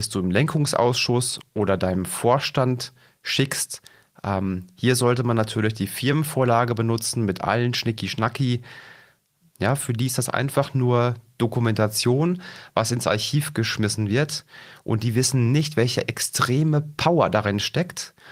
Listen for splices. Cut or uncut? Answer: cut